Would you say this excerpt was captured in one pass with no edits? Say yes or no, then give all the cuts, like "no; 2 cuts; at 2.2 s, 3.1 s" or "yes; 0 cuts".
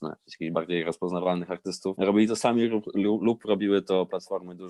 yes; 0 cuts